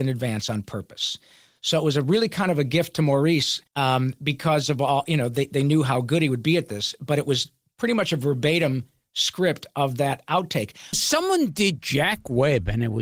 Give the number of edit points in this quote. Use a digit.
2